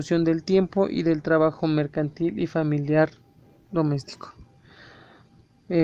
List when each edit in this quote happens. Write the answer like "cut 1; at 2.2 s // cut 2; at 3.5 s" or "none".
none

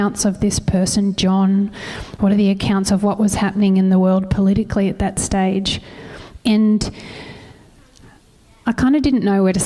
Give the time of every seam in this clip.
cut 1; at 6.4 s

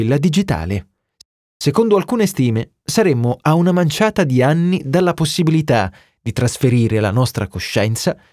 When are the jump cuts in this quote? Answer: none

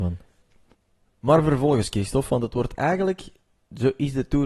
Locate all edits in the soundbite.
none

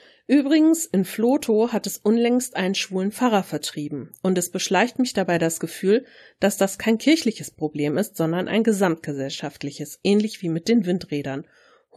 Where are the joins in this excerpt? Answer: none

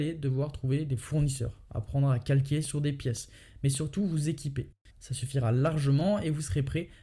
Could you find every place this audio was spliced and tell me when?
cut 1; at 4.9 s

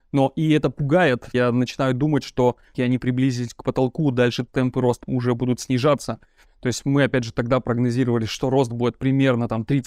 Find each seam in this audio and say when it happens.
cut 1; at 6.5 s

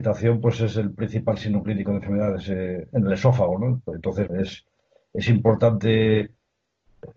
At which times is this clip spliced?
cut 1; at 2.9 s // cut 2; at 4.3 s

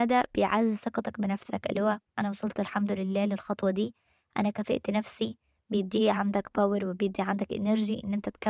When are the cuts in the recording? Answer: cut 1; at 2.1 s

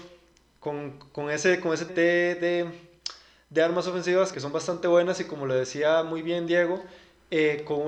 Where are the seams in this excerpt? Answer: cut 1; at 1.9 s // cut 2; at 4.3 s

